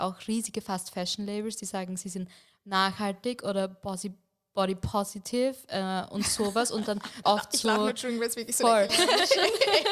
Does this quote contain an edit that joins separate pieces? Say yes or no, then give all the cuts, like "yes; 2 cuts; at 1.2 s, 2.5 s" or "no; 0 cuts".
yes; 2 cuts; at 7.2 s, 8.9 s